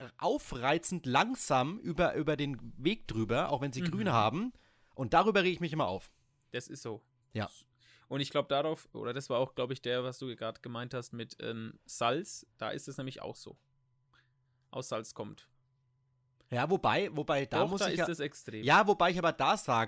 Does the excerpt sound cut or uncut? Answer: uncut